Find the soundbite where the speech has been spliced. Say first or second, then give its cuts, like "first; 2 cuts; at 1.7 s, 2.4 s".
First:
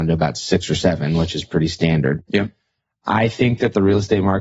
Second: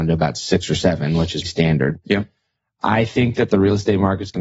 second; 1 cut; at 1.5 s